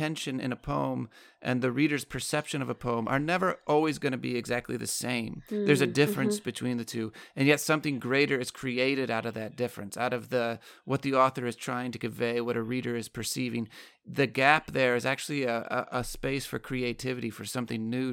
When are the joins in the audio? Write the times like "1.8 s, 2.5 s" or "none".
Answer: none